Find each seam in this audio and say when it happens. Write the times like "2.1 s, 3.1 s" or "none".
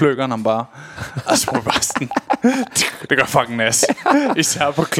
none